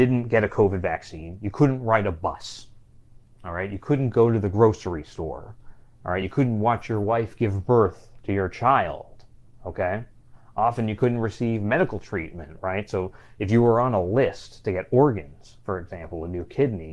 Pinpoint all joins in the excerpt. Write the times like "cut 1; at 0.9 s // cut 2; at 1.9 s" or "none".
none